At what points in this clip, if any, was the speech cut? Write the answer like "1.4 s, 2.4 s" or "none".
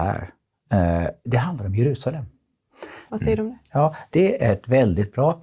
1.2 s, 3.1 s